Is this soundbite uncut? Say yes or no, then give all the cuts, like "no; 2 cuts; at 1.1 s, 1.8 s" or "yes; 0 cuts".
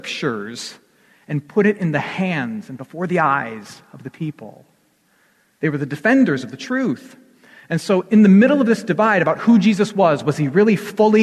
yes; 0 cuts